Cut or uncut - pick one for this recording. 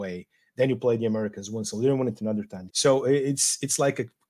cut